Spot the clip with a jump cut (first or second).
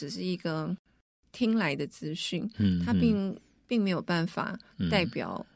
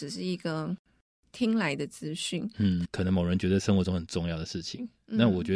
second